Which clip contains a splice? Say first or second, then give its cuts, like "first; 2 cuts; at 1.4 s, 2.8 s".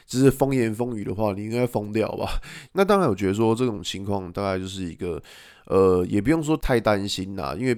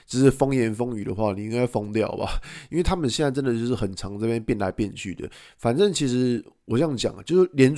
first; 2 cuts; at 2.7 s, 6.6 s